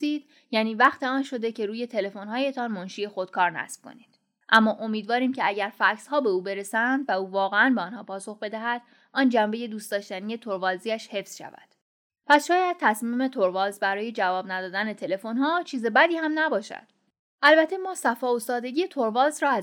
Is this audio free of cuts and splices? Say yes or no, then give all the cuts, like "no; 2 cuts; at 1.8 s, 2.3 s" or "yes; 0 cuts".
no; 2 cuts; at 4.4 s, 12.1 s